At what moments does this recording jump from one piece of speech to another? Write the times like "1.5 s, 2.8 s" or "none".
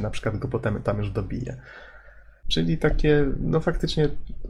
2.4 s